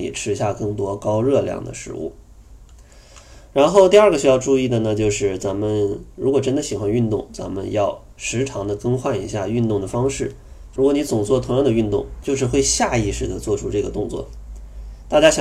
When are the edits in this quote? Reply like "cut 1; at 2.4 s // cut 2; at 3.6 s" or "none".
cut 1; at 10.7 s // cut 2; at 12.2 s